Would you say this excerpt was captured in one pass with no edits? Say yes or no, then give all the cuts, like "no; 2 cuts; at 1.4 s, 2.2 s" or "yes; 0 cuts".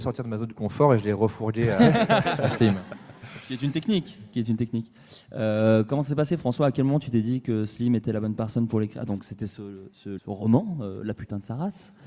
no; 1 cut; at 10.2 s